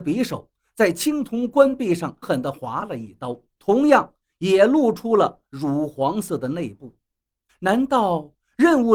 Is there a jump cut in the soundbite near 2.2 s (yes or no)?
yes